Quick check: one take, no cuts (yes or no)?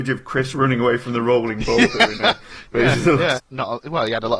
no